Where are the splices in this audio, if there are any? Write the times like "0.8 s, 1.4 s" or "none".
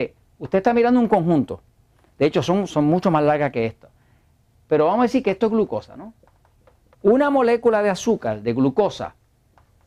2.7 s, 6.9 s